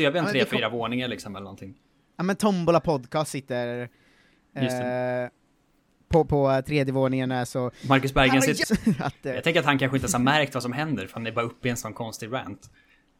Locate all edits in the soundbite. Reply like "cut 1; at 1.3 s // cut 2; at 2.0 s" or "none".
cut 1; at 6.3 s // cut 2; at 8.6 s